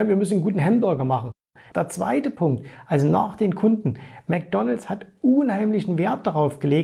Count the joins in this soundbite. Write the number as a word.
one